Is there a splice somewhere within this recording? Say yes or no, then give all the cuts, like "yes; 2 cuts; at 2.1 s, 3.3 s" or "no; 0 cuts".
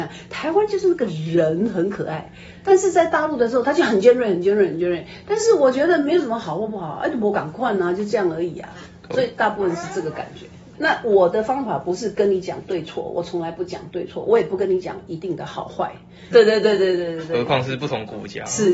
yes; 2 cuts; at 10.7 s, 16.3 s